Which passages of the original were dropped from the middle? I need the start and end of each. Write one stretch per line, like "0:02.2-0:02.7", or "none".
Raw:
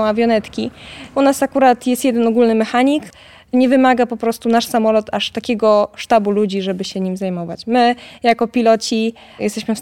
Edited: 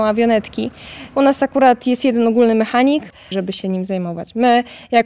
0:03.3-0:06.6